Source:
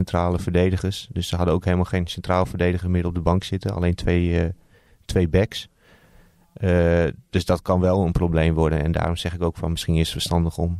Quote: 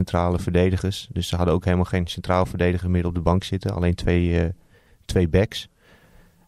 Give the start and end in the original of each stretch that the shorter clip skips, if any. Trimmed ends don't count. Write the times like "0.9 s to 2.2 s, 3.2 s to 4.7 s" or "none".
none